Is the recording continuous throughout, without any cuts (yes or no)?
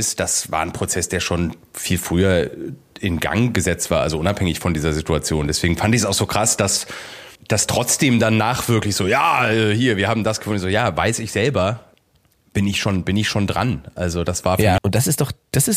no